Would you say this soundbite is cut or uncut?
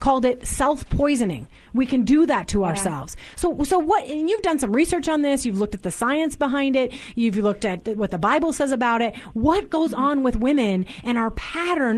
uncut